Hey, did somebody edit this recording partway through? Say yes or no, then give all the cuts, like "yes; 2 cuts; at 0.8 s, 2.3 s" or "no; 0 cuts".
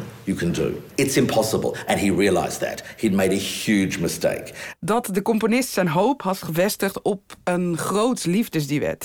yes; 2 cuts; at 3.7 s, 4.7 s